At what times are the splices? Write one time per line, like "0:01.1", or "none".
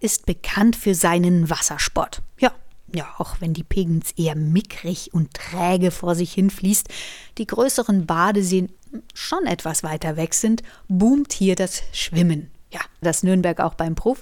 0:13.0

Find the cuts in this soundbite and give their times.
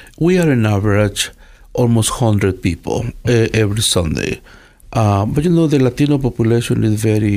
0:03.2
0:04.8

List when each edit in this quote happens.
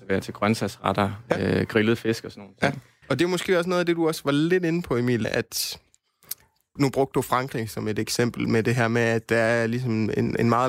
0:03.0
0:05.2
0:06.8

